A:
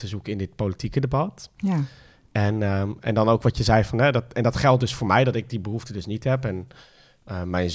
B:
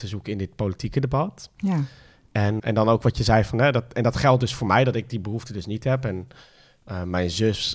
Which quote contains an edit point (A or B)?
B